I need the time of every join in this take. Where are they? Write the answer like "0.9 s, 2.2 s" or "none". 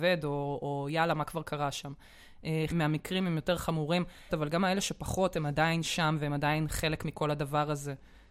2.7 s, 4.3 s